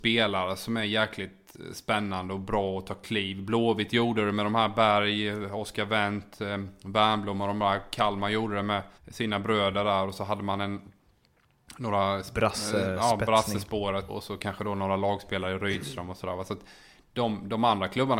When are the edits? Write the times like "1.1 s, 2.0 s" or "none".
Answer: 9.0 s, 14.1 s